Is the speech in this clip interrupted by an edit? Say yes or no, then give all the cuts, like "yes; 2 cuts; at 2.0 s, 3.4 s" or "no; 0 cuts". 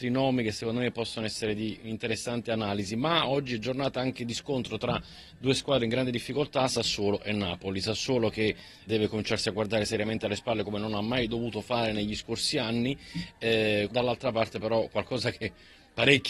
yes; 2 cuts; at 8.9 s, 13.9 s